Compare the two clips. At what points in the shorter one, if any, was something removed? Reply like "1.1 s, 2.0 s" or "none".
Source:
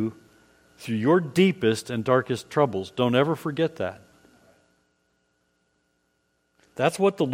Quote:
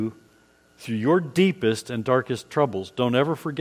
none